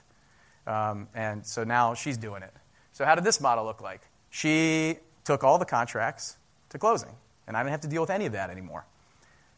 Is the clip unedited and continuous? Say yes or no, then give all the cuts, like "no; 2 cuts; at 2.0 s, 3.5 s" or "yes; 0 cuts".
yes; 0 cuts